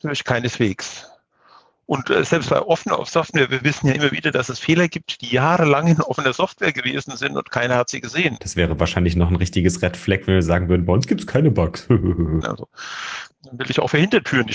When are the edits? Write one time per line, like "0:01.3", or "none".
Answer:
0:08.4
0:12.4